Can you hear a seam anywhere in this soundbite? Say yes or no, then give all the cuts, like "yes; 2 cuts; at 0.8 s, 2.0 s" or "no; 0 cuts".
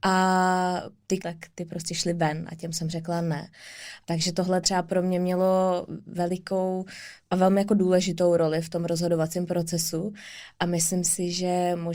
yes; 2 cuts; at 1.2 s, 4.0 s